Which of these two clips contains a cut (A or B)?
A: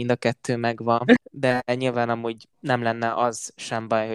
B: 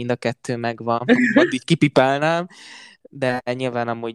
A